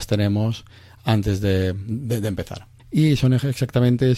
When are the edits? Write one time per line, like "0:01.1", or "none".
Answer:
0:02.8